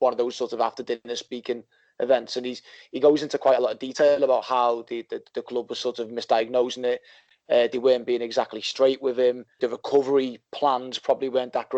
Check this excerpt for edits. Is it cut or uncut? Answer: uncut